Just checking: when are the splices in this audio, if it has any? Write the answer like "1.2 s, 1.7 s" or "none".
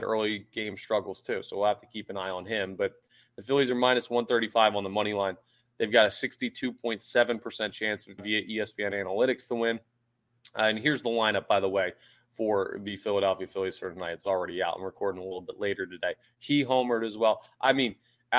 8.2 s, 16.2 s